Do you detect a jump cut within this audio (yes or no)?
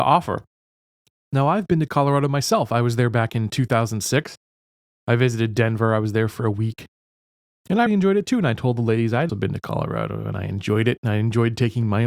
yes